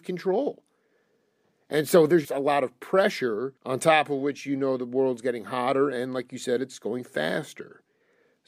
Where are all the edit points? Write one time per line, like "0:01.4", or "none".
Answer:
0:02.2
0:03.6